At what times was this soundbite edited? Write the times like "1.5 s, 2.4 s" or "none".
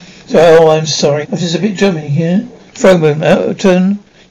1.2 s, 2.7 s